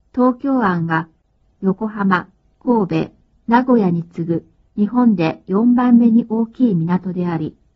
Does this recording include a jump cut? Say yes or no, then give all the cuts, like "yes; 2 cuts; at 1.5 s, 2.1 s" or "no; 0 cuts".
no; 0 cuts